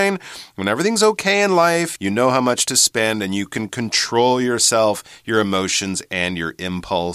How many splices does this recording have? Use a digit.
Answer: 1